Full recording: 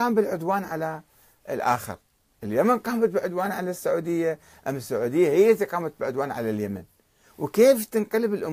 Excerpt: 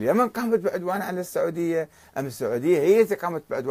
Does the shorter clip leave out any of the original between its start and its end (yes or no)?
no